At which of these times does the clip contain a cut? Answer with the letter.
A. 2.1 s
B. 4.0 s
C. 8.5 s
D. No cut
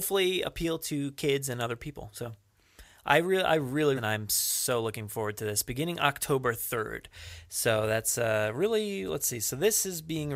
B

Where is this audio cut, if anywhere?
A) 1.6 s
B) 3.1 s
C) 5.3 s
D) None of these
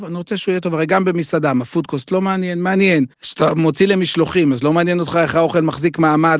B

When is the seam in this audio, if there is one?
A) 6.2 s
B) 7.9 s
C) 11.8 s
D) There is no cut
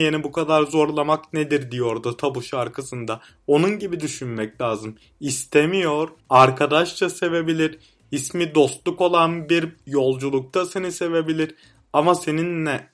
A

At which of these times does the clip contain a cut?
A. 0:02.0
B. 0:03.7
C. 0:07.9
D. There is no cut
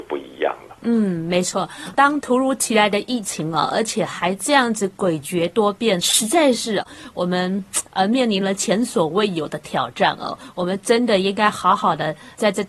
C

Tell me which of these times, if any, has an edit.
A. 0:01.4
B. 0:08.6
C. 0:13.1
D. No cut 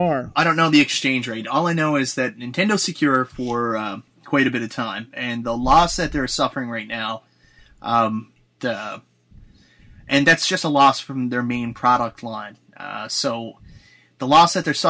B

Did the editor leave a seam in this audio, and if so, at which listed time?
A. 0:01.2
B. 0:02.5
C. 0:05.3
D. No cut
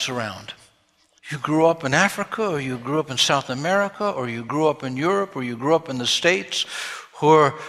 A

